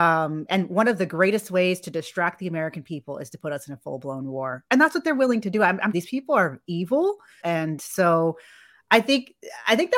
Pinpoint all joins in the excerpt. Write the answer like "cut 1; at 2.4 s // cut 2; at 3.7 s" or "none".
cut 1; at 5.9 s // cut 2; at 7.4 s